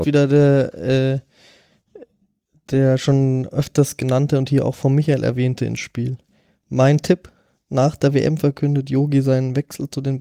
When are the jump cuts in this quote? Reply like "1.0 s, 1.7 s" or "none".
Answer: none